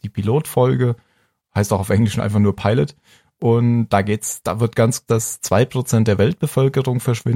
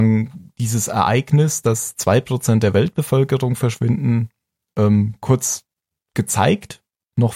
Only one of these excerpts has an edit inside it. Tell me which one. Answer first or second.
first